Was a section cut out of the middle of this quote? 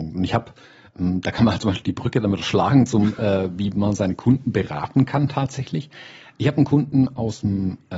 no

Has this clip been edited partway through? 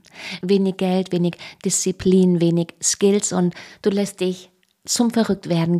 no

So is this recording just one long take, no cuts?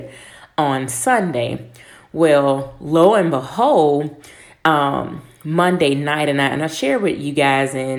yes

